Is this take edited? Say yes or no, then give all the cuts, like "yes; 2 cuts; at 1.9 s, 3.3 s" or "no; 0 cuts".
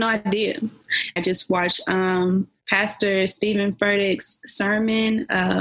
yes; 1 cut; at 1.2 s